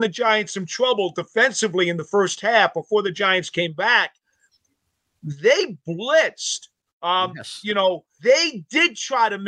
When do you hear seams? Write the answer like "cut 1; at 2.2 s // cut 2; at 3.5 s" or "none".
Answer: cut 1; at 6.9 s // cut 2; at 8.2 s